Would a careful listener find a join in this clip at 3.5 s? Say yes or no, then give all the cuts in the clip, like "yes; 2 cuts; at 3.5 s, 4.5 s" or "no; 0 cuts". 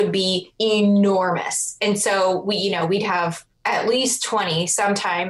yes; 1 cut; at 3.5 s